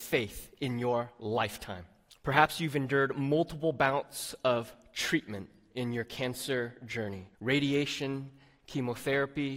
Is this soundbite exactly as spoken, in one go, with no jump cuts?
no; 2 cuts; at 2.1 s, 7.3 s

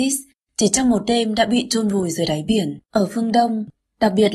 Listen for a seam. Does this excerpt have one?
yes; 1 cut; at 2.8 s

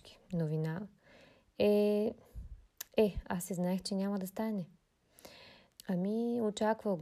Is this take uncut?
no; 1 cut; at 5.7 s

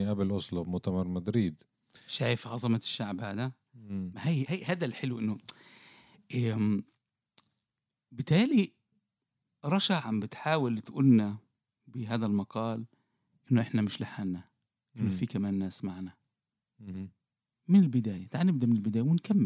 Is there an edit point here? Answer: yes; 2 cuts; at 4.5 s, 17.5 s

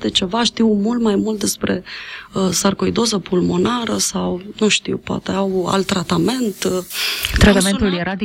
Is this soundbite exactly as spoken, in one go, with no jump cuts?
yes; 0 cuts

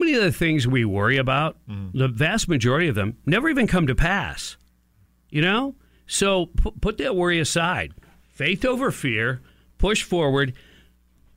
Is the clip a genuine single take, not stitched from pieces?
yes; 0 cuts

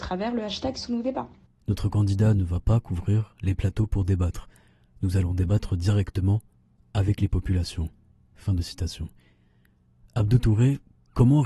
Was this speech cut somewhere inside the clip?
yes; 1 cut; at 1.6 s

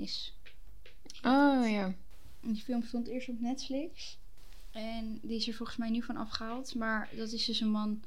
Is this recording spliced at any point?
no; 0 cuts

